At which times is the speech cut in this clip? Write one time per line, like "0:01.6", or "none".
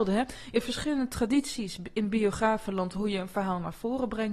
none